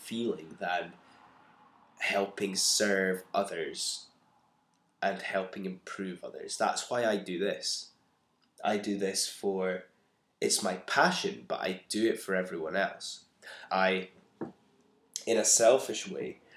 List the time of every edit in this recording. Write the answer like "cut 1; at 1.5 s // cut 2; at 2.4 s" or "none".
cut 1; at 13.7 s